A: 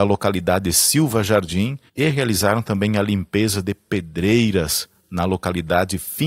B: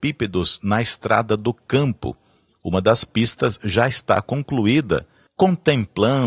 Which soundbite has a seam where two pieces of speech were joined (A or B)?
A